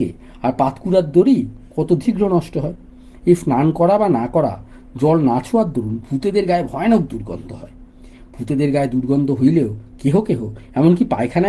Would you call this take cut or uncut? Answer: cut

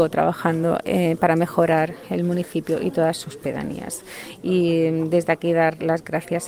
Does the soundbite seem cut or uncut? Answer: uncut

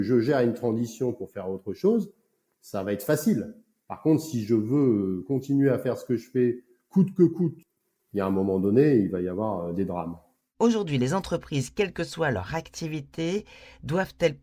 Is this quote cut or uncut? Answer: uncut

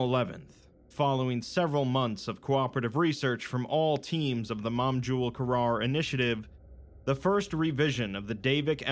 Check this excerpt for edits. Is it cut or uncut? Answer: uncut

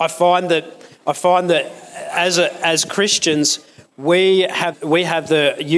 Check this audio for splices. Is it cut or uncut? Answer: cut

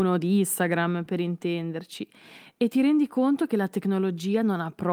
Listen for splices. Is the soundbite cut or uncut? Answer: uncut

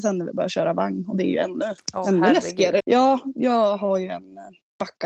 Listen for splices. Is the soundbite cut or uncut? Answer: cut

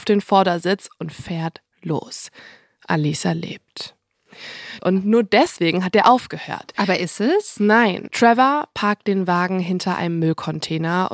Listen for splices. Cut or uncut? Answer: cut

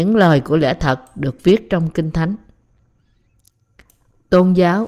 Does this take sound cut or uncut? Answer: uncut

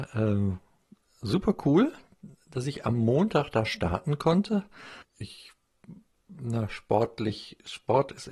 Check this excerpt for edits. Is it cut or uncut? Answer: cut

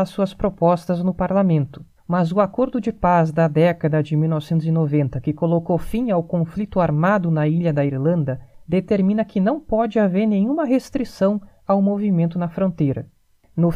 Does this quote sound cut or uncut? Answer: cut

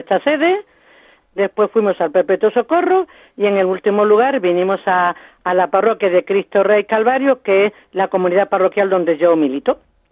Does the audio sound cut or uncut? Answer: cut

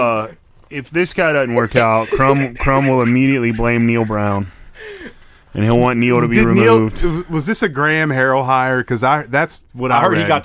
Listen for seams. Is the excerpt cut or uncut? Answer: uncut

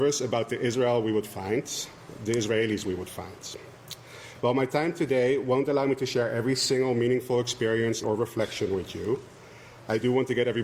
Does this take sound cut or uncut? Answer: cut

